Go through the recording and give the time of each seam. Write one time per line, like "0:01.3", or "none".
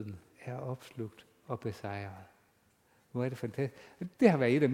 none